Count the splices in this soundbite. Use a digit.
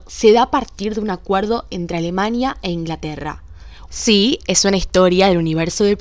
1